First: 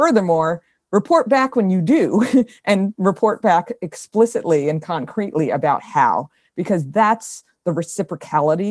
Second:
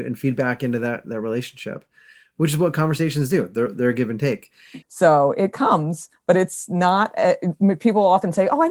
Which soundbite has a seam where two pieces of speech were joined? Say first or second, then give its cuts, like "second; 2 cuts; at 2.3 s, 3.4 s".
second; 1 cut; at 4.8 s